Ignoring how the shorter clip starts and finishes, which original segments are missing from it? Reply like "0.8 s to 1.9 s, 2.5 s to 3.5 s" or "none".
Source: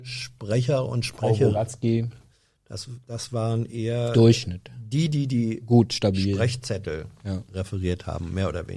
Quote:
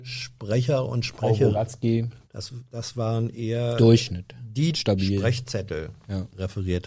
2.2 s to 2.6 s, 5.1 s to 5.9 s